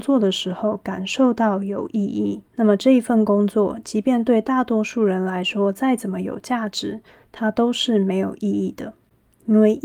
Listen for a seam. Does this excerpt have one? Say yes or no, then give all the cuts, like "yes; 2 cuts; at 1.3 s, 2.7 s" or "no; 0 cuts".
yes; 1 cut; at 2.5 s